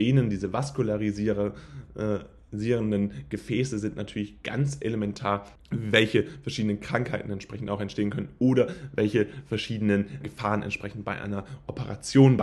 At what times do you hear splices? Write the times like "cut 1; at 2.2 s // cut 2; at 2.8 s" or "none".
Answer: cut 1; at 5.6 s // cut 2; at 10.2 s